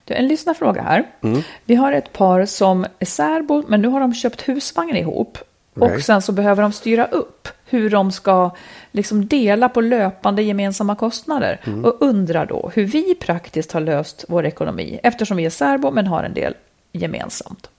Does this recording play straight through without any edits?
yes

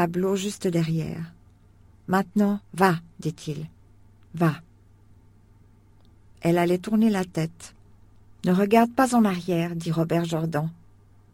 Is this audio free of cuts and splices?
yes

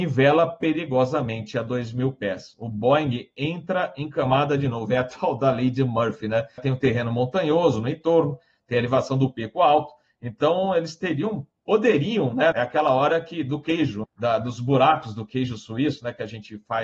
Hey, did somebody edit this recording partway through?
yes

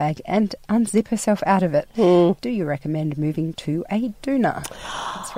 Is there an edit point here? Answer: yes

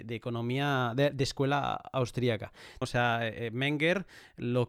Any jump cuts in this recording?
yes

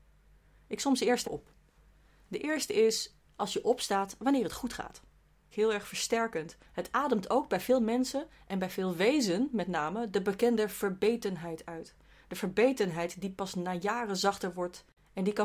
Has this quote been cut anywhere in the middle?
yes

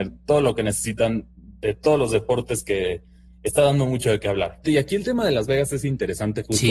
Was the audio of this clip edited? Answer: yes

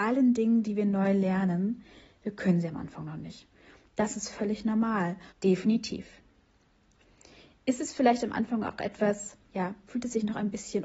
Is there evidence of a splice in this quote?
yes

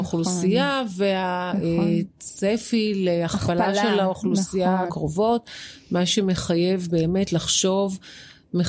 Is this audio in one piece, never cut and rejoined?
no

